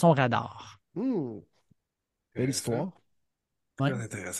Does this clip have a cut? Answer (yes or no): no